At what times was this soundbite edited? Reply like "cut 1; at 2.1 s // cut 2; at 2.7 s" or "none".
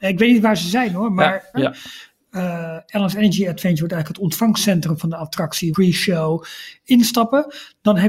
cut 1; at 1.5 s // cut 2; at 5.7 s